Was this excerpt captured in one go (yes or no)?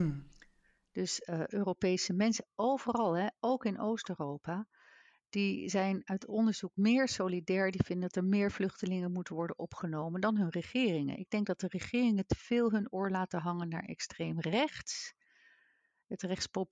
yes